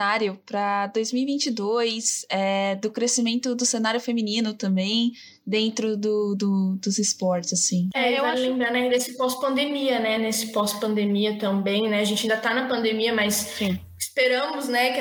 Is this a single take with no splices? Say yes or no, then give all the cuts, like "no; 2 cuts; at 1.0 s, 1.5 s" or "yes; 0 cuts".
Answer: yes; 0 cuts